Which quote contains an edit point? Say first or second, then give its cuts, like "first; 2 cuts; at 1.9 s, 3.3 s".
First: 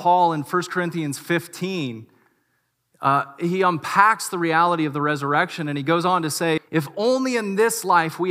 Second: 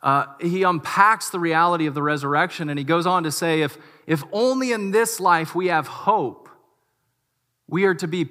first; 1 cut; at 6.6 s